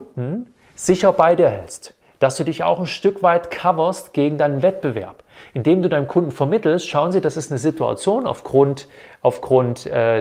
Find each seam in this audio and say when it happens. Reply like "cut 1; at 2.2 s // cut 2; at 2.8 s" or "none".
none